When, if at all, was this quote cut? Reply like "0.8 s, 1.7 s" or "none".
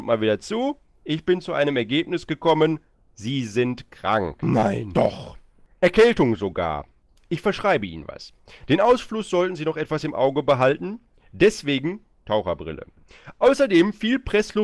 none